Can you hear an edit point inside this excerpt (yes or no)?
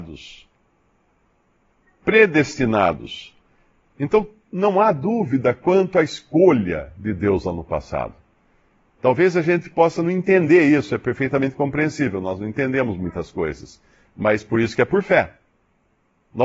no